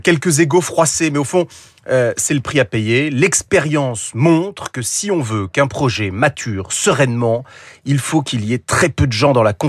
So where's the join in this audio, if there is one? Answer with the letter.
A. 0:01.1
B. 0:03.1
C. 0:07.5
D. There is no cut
D